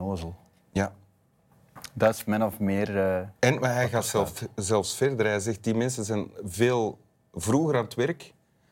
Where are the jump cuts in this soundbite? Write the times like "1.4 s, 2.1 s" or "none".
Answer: 3.4 s